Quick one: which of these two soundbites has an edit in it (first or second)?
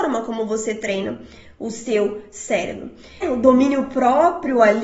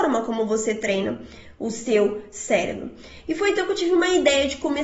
first